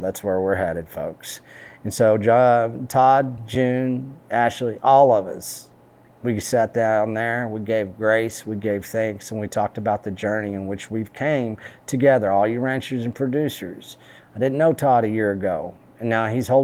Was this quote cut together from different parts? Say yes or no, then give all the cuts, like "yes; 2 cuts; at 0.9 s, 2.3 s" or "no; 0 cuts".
no; 0 cuts